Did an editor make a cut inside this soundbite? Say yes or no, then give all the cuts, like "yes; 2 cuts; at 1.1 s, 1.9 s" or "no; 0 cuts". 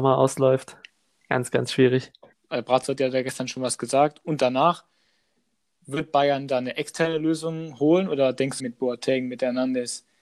yes; 2 cuts; at 2.3 s, 8.6 s